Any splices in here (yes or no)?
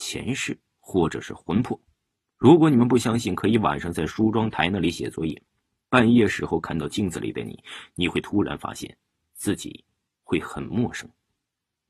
no